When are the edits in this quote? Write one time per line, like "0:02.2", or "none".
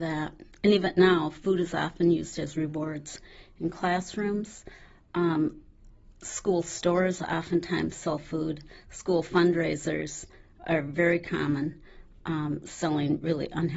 none